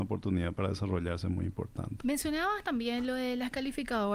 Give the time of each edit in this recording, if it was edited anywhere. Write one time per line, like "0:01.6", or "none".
0:02.0